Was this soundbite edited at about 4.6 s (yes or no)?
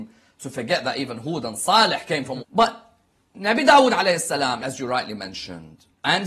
yes